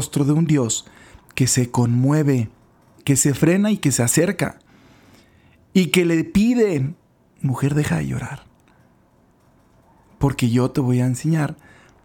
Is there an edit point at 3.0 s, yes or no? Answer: yes